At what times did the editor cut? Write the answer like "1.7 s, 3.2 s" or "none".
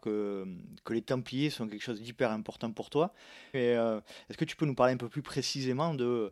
3.5 s